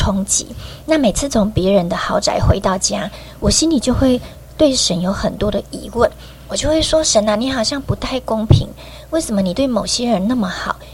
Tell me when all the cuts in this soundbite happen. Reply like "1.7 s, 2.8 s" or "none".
none

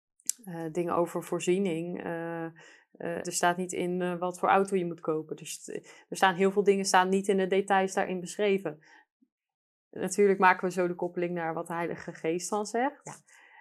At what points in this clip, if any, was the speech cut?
3.2 s

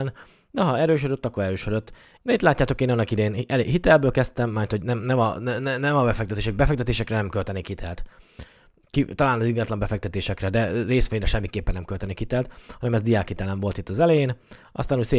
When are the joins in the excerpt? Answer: 2.2 s

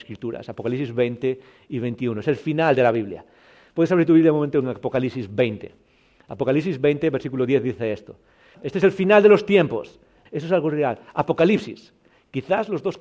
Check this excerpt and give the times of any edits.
8.5 s, 10.3 s

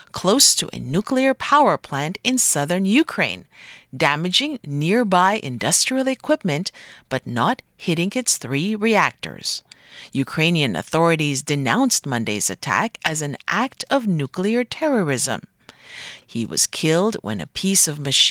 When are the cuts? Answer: 16.2 s

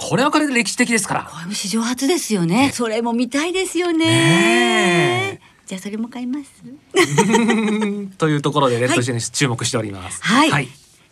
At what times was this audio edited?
2.7 s

